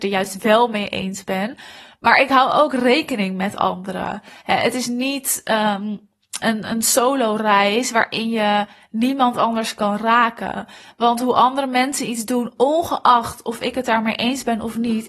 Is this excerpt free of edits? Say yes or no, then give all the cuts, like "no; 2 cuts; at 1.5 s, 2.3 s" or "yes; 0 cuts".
no; 1 cut; at 6.4 s